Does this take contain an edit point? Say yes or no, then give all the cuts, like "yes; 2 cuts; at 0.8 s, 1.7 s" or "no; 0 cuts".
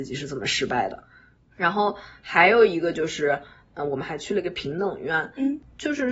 no; 0 cuts